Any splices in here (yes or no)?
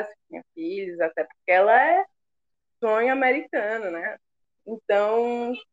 yes